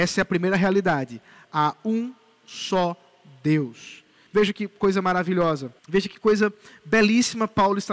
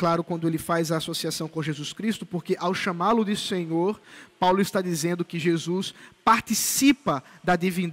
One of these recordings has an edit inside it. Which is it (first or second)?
first